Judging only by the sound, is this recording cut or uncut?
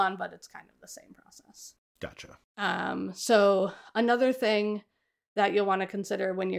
uncut